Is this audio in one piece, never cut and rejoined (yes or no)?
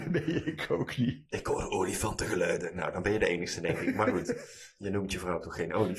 yes